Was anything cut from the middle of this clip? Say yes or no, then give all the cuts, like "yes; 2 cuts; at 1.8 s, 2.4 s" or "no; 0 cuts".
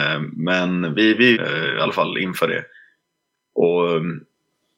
yes; 1 cut; at 1.3 s